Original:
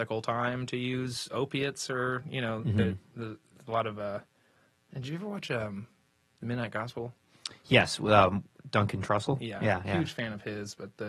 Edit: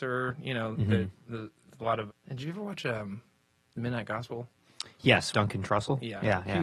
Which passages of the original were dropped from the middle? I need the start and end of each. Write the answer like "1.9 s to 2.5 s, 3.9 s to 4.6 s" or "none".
3.9 s to 4.7 s, 8.0 s to 8.7 s